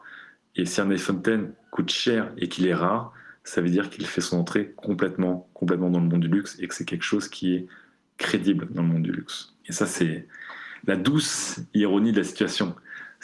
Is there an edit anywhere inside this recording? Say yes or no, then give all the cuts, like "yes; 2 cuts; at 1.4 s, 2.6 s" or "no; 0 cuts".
yes; 1 cut; at 9.6 s